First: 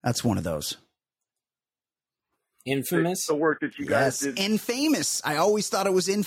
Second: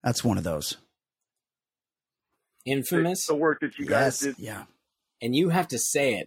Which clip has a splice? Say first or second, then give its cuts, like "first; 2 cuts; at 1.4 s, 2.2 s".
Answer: second; 1 cut; at 4.3 s